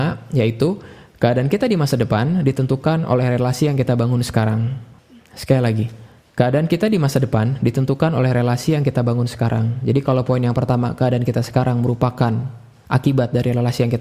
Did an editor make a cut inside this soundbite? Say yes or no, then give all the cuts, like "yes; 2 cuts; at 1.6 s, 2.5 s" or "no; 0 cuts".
no; 0 cuts